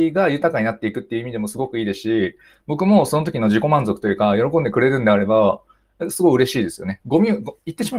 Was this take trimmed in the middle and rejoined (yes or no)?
yes